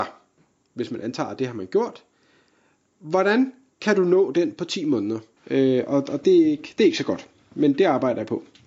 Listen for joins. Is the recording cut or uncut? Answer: cut